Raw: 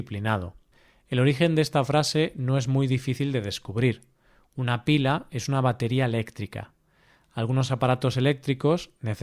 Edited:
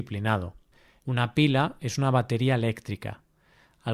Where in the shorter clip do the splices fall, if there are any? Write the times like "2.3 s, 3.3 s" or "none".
1.0 s